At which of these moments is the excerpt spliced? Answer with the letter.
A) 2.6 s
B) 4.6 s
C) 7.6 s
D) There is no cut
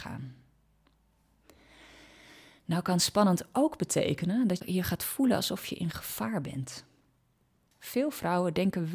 B